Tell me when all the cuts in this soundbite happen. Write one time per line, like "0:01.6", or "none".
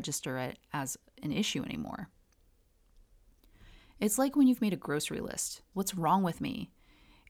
0:05.7